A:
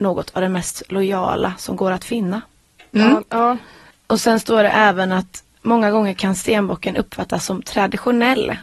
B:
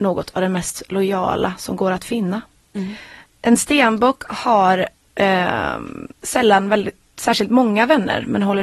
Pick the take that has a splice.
B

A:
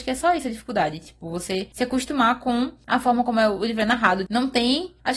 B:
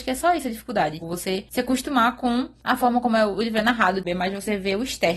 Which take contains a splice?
B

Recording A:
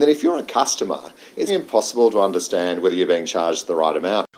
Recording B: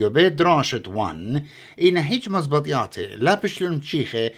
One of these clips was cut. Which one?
A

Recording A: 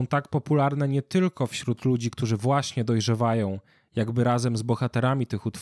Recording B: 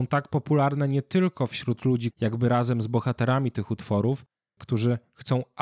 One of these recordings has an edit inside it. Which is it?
B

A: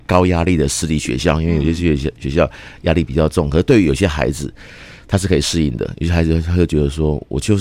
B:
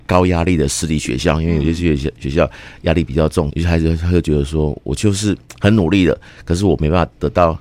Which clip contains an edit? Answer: B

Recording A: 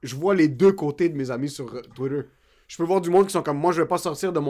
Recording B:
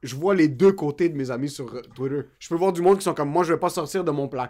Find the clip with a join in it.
B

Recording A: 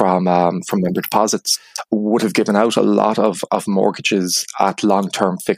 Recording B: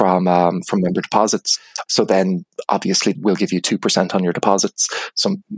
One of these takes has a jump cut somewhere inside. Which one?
B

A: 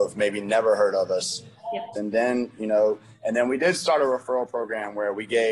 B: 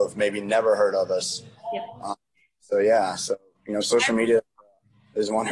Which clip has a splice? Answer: A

